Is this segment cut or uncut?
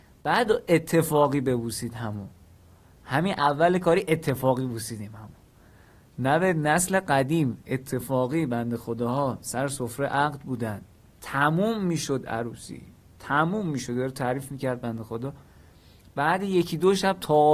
uncut